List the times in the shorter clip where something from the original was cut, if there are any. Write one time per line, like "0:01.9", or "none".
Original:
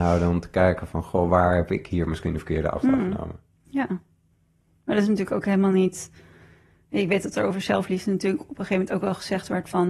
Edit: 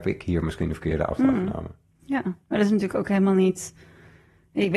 0:02.4